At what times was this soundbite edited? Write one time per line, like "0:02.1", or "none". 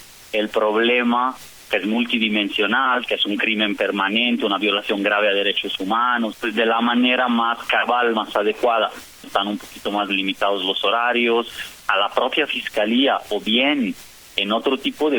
0:06.3
0:09.2
0:11.8